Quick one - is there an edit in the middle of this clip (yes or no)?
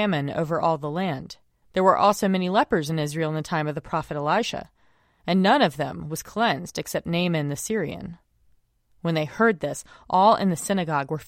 yes